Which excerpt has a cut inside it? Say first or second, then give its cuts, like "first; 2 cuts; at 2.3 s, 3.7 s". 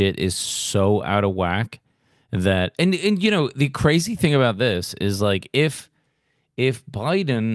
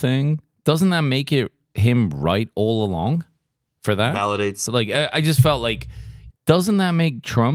second; 2 cuts; at 4.7 s, 6.3 s